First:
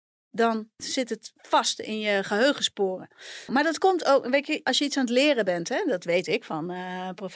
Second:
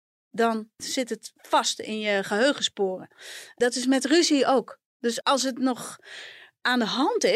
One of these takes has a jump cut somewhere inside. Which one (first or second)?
first